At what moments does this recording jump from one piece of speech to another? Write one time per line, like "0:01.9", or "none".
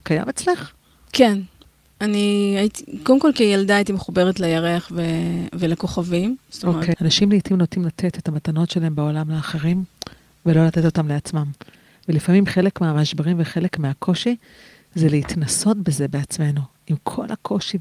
0:06.9